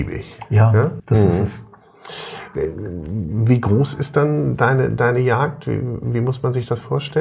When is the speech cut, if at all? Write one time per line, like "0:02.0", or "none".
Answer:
0:01.0